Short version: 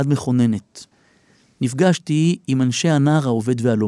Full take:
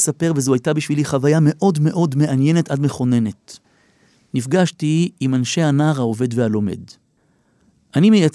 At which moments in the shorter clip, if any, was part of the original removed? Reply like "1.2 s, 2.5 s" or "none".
none